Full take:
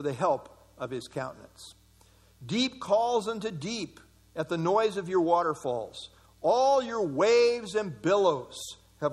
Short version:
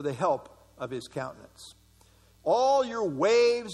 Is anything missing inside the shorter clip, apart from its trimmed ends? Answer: yes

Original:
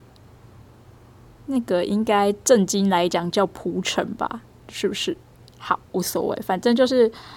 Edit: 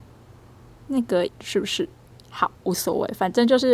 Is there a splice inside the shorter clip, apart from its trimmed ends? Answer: yes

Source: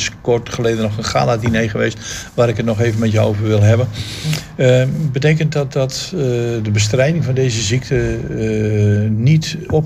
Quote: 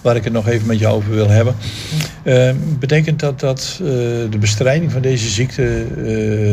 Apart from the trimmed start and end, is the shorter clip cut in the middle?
no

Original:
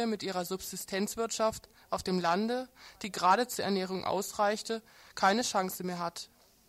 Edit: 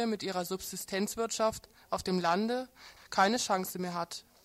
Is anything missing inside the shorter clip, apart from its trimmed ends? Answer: yes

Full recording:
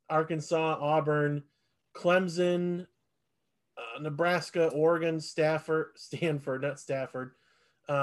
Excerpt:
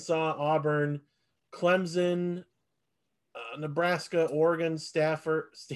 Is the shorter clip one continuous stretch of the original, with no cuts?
yes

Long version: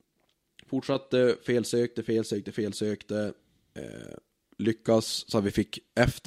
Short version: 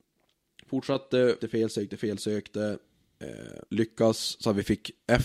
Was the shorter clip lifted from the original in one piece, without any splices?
no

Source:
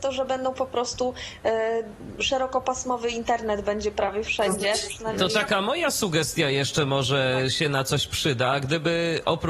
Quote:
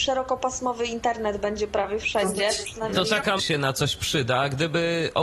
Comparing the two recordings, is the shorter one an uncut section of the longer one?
no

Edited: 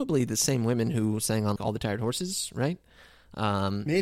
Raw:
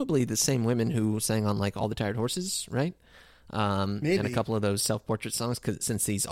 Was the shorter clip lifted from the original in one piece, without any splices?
no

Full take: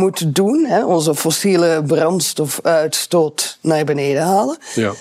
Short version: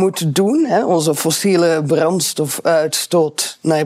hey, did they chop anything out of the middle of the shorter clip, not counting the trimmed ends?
no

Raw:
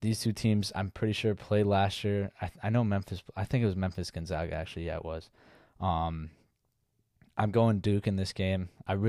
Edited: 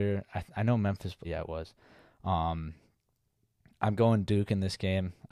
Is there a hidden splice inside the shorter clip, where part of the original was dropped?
yes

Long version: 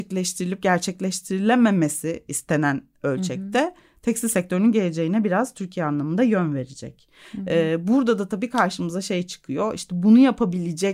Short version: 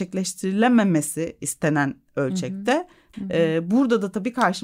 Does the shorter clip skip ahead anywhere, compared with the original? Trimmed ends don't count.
yes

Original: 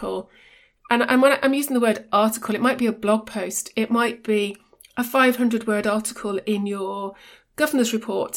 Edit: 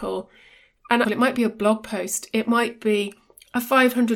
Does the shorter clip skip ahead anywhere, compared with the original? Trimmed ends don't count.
yes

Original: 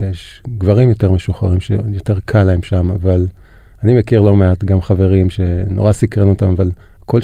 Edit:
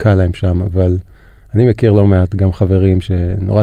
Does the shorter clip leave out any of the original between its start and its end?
no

